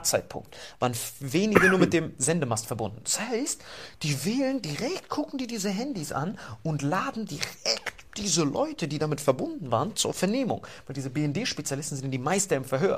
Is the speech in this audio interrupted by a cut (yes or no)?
no